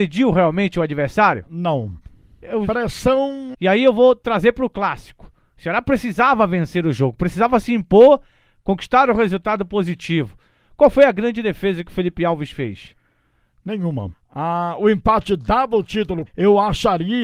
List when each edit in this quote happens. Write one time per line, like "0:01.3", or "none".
0:03.5
0:14.1
0:16.3